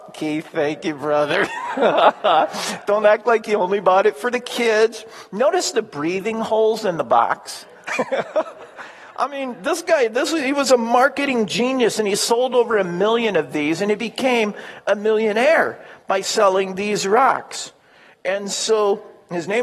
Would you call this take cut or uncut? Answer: uncut